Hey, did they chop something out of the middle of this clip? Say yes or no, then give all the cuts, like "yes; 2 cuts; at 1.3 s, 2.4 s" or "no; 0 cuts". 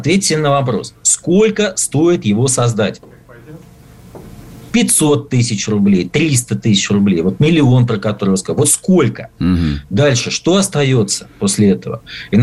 no; 0 cuts